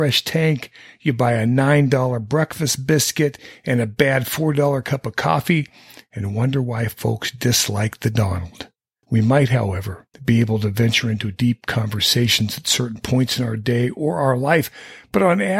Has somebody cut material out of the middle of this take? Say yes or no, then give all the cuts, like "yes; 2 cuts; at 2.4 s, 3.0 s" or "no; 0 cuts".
yes; 2 cuts; at 9.0 s, 10.1 s